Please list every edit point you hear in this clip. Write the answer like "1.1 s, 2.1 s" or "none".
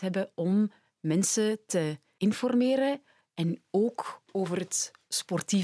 none